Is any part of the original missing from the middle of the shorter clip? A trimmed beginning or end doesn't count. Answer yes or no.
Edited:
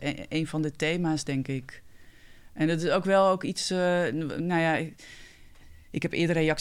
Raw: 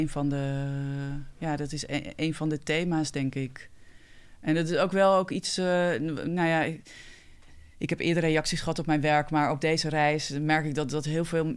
no